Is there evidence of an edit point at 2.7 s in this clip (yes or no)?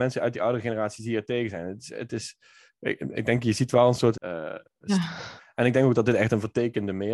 no